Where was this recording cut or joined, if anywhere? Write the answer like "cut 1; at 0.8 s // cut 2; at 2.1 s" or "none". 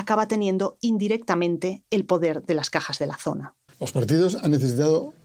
cut 1; at 3.7 s